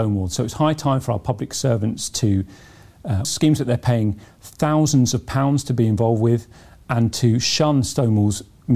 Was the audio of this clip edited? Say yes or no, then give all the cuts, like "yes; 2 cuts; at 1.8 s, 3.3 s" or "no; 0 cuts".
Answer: yes; 1 cut; at 3.2 s